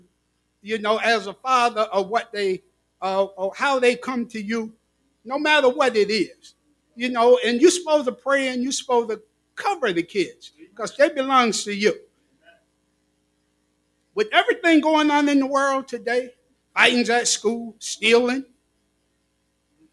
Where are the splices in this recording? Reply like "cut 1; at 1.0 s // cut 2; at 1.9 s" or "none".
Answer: cut 1; at 16.5 s